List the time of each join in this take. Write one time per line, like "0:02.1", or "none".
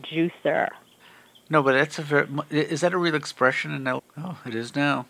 0:04.0